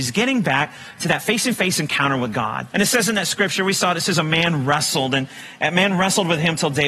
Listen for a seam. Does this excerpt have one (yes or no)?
yes